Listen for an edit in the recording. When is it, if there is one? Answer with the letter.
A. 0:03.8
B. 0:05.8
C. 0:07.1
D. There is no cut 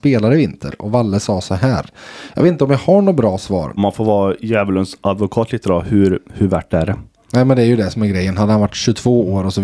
A